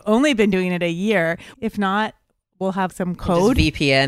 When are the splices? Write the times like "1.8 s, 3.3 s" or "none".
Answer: 1.5 s, 2.9 s